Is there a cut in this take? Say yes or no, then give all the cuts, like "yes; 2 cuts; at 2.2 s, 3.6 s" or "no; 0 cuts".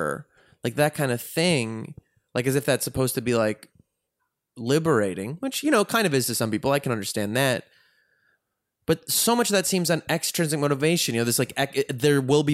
no; 0 cuts